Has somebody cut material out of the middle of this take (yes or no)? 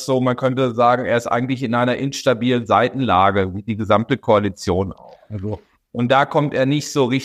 no